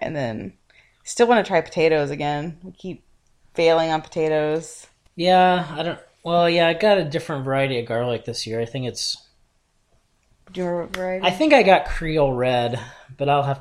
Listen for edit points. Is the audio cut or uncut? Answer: uncut